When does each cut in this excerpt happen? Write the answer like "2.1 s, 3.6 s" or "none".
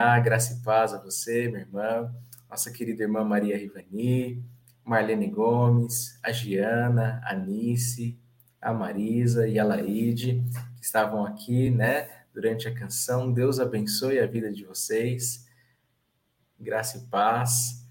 none